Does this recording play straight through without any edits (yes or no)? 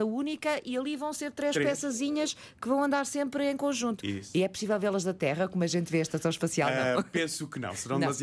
yes